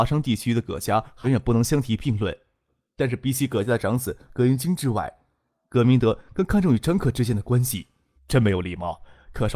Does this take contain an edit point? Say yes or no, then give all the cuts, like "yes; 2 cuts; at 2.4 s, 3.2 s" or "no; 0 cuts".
yes; 2 cuts; at 1.2 s, 8.2 s